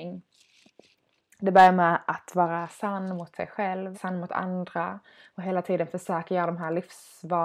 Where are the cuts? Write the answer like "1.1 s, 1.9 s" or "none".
3.9 s